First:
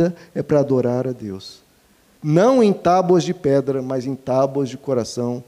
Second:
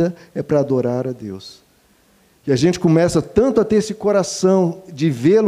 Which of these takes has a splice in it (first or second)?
first